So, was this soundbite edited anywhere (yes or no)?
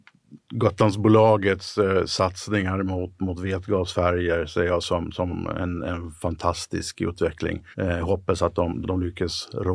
yes